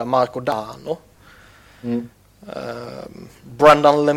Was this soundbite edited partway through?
no; 0 cuts

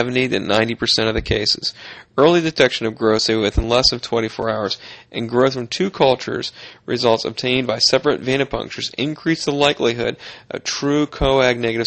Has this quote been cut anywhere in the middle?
no; 0 cuts

